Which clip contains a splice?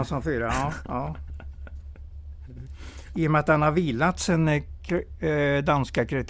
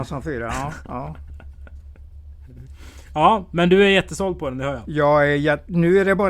first; 1 cut; at 3.1 s

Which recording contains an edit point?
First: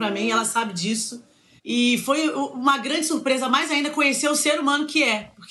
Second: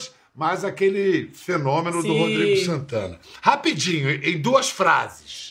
first; 1 cut; at 1.6 s

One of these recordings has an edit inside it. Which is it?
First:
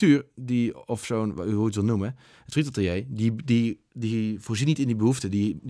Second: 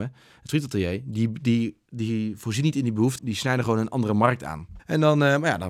second; 2 cuts; at 3.2 s, 4.8 s

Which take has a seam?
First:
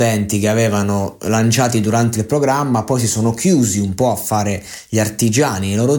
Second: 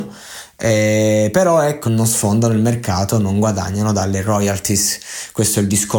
second; 1 cut; at 1.8 s

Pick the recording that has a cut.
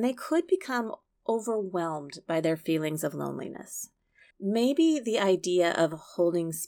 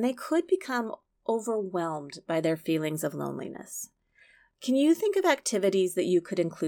first; 1 cut; at 4.3 s

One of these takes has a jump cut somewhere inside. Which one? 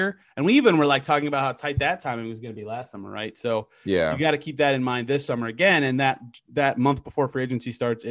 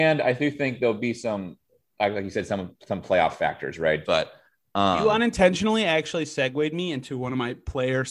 second; 1 cut; at 4.0 s

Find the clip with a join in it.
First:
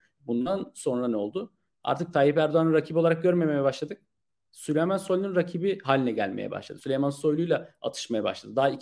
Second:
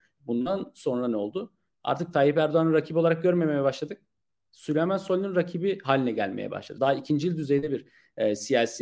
second; 1 cut; at 6.8 s

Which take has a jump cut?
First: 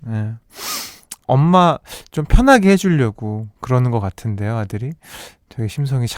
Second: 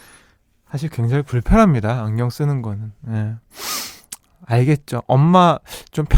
first; 1 cut; at 1.2 s

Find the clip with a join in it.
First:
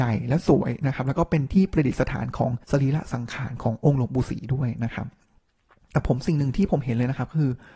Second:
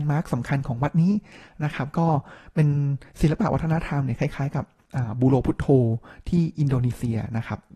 first; 1 cut; at 2.6 s

